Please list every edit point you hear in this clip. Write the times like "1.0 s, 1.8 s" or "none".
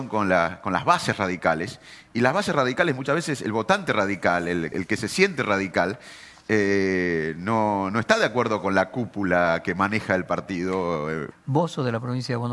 4.7 s, 11.3 s